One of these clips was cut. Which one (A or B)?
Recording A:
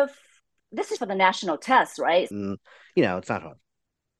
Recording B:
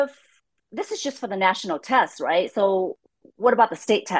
A